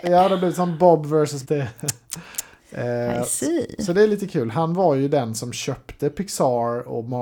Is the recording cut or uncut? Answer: cut